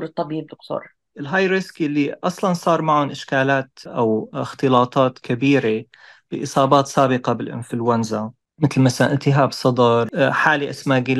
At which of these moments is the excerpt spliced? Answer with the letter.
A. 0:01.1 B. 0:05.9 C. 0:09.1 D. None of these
A